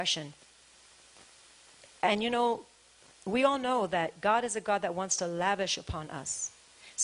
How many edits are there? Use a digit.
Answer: 0